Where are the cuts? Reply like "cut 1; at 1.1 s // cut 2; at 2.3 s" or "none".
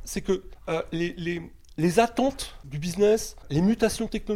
none